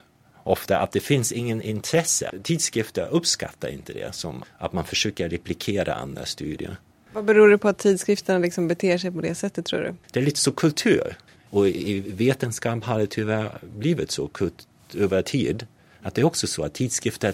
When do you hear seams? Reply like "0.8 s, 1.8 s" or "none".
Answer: 4.4 s, 10.0 s, 11.5 s